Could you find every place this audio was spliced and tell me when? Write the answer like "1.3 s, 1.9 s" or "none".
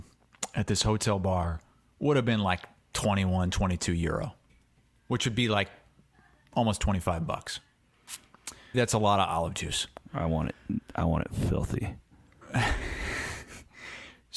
8.7 s